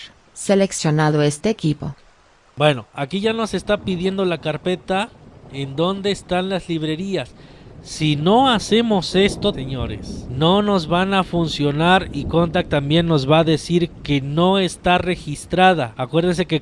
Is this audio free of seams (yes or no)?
no